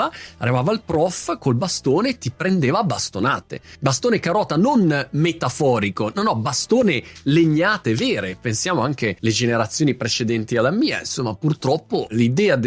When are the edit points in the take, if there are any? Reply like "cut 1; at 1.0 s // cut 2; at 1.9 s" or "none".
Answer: none